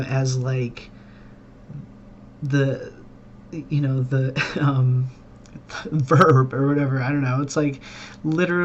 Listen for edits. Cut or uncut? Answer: uncut